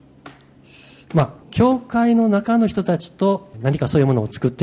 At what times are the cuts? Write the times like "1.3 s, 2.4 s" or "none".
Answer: 1.4 s, 3.5 s